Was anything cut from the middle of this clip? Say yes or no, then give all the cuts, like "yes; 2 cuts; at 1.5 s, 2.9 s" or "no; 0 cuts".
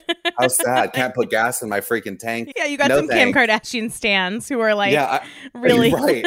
yes; 1 cut; at 2.5 s